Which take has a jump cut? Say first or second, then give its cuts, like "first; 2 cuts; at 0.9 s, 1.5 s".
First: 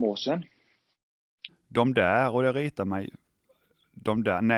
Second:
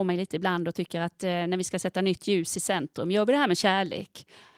first; 1 cut; at 1.5 s